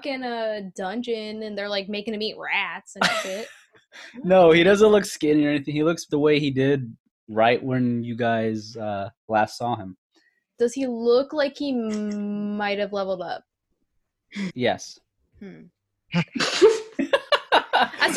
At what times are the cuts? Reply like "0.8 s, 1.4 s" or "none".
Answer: 6.1 s, 14.5 s, 15.7 s